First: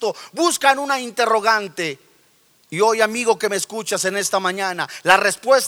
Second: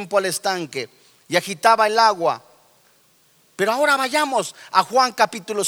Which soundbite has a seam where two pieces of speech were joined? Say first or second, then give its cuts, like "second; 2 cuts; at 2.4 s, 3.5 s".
second; 1 cut; at 3.5 s